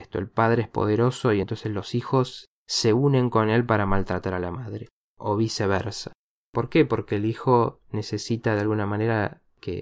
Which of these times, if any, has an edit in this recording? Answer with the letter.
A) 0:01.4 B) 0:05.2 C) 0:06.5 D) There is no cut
D